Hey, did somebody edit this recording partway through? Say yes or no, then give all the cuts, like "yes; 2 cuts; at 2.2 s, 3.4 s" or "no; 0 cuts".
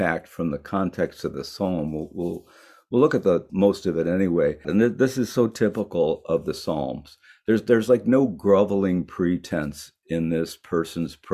yes; 2 cuts; at 3.5 s, 4.6 s